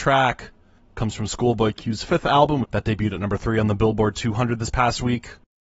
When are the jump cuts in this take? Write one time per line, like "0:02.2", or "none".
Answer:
0:02.6